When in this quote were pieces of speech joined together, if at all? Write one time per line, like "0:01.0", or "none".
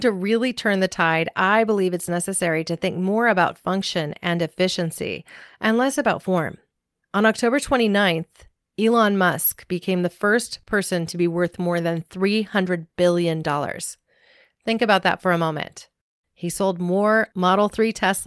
none